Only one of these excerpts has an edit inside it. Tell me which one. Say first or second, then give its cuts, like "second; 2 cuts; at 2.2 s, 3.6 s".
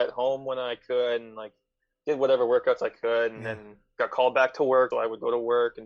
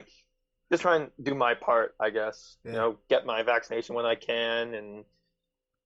first; 1 cut; at 4.9 s